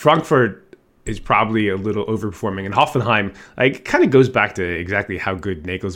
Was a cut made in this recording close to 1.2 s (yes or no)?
no